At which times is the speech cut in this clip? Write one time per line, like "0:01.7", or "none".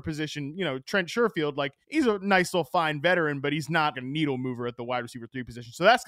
0:01.8
0:03.9